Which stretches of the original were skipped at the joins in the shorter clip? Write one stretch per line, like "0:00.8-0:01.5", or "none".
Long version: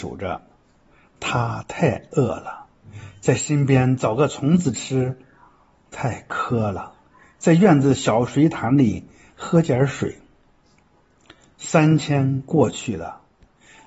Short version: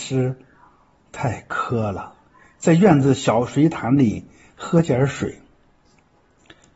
none

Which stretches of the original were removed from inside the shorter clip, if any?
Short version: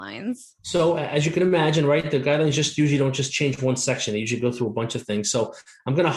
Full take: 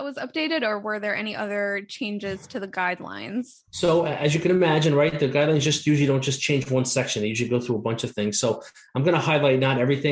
none

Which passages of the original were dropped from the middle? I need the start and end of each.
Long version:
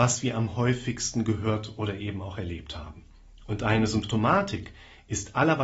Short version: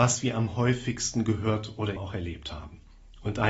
0:02.0-0:02.2

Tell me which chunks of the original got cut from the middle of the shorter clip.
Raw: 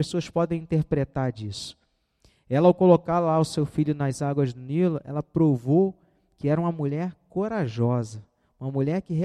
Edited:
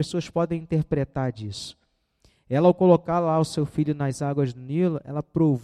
none

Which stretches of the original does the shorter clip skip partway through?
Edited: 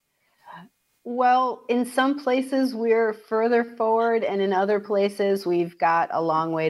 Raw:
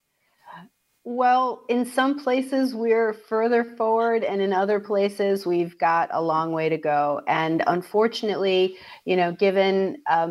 none

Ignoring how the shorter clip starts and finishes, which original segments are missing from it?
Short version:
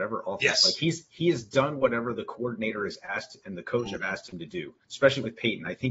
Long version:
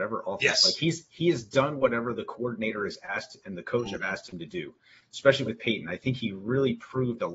0:04.8-0:05.1

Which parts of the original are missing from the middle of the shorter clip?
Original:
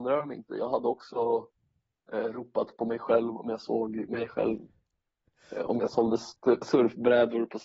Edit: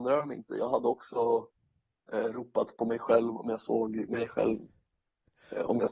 none

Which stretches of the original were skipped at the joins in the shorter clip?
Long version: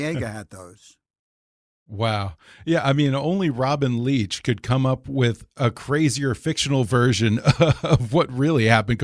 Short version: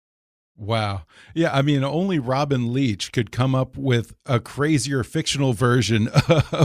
none

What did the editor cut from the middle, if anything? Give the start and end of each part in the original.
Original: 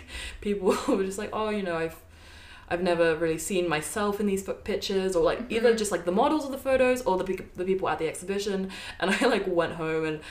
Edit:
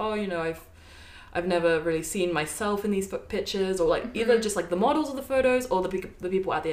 none

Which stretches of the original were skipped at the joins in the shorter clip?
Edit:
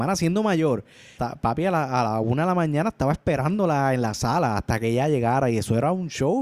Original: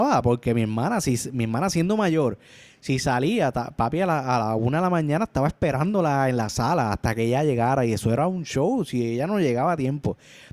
0:02.7-0:03.5

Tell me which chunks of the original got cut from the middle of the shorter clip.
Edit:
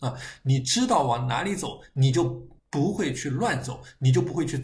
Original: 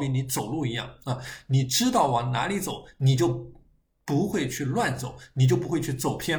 0:03.6-0:03.9

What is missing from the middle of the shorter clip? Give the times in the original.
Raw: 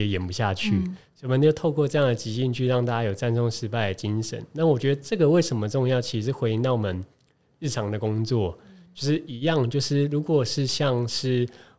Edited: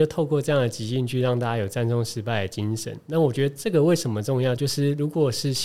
0:06.0-0:09.7

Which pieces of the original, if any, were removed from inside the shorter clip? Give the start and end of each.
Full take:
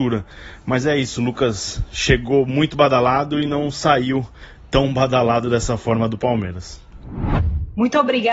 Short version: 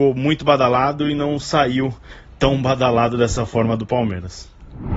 none

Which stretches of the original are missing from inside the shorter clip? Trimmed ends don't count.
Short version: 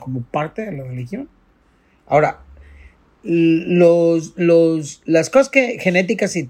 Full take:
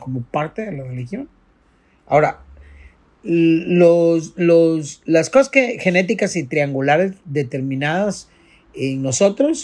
none

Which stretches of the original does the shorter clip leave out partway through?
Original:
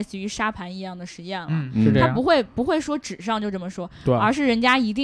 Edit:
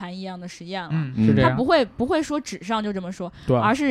none

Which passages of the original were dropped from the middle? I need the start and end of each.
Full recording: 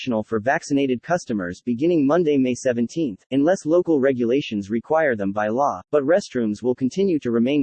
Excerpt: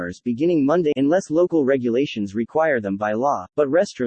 0:02.3-0:03.3

